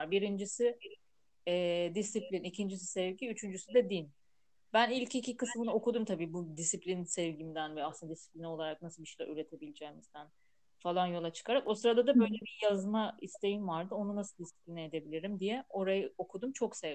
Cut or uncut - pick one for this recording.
uncut